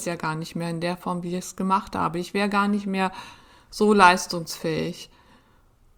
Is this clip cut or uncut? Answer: uncut